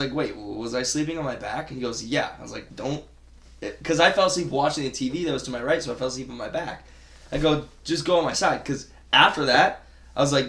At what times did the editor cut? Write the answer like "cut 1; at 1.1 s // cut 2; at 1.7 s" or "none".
cut 1; at 2.7 s